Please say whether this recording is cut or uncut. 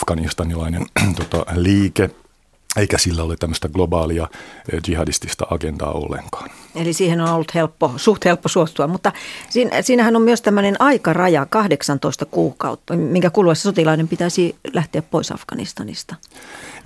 cut